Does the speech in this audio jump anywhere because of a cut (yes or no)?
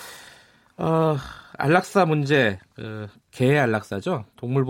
no